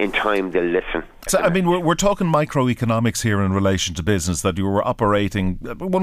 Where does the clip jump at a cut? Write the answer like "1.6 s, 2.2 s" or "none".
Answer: 1.3 s